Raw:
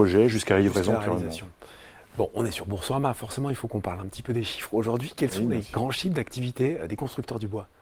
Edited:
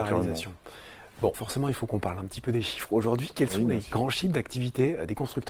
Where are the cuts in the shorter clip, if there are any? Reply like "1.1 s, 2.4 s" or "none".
1.3 s